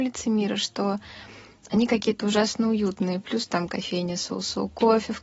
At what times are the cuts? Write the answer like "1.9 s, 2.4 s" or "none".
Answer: none